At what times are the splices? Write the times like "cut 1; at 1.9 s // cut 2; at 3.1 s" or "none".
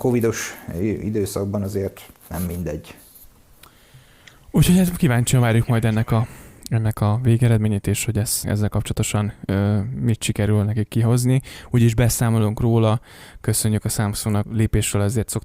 cut 1; at 8.4 s // cut 2; at 14.4 s